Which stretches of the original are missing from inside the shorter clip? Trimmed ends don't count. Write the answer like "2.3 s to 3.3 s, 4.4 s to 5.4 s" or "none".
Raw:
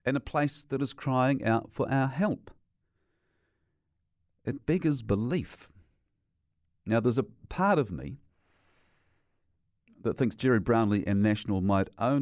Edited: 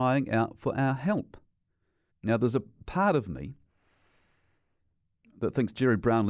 3.2 s to 6.7 s